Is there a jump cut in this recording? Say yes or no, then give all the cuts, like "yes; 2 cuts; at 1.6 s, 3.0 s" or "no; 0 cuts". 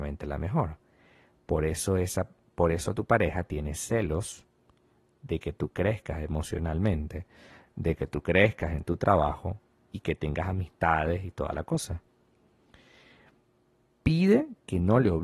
no; 0 cuts